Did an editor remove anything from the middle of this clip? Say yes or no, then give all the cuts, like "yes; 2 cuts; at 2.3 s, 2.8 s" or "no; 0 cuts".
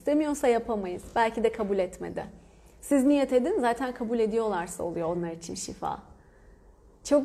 no; 0 cuts